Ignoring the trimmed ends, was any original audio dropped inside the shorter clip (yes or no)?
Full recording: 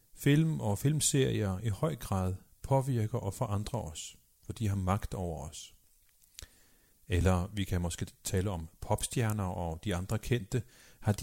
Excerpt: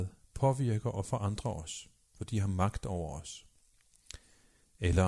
no